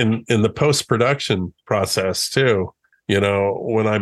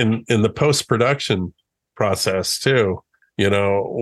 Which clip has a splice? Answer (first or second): first